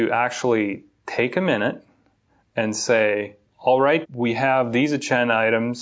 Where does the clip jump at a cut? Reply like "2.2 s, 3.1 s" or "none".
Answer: 4.0 s